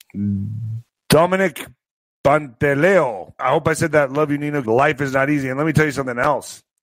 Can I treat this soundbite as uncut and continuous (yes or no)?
no